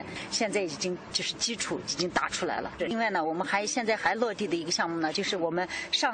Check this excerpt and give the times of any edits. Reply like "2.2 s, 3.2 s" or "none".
2.8 s, 5.1 s

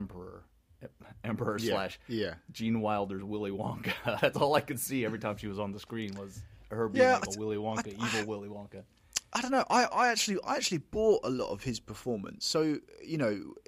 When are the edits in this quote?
none

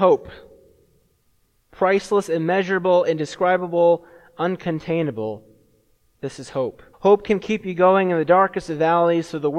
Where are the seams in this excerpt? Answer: 6.9 s

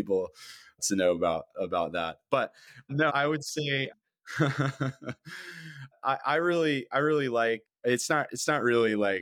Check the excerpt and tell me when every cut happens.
3.1 s

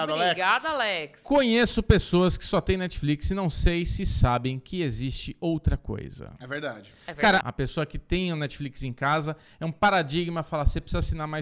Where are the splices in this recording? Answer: 7.4 s

